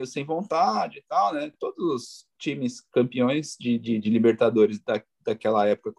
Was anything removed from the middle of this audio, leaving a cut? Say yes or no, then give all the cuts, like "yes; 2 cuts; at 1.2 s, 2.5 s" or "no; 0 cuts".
no; 0 cuts